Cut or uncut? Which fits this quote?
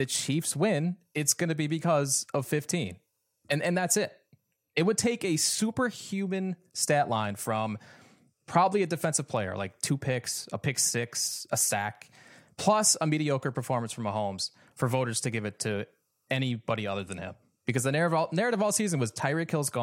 uncut